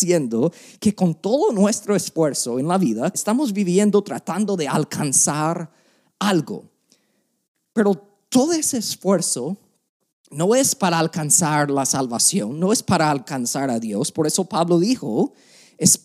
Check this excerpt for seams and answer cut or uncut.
cut